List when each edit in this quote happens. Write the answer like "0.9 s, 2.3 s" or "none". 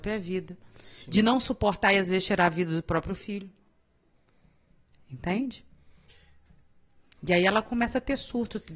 none